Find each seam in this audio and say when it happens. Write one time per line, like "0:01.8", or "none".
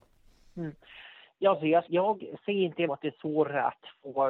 0:01.9
0:02.9